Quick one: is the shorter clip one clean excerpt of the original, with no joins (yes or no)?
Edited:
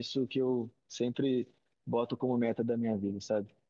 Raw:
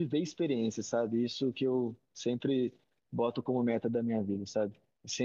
yes